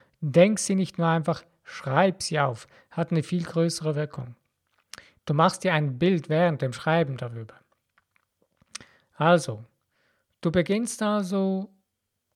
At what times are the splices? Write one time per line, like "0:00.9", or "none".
0:05.2